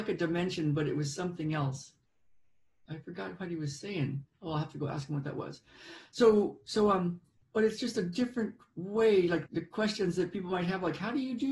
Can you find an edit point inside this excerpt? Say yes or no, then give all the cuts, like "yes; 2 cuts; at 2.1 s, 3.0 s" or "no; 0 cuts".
yes; 2 cuts; at 4.3 s, 9.5 s